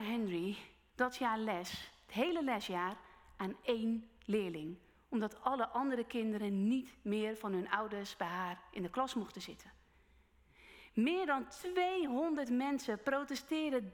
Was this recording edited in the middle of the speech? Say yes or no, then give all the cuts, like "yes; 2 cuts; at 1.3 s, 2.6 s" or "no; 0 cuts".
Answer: no; 0 cuts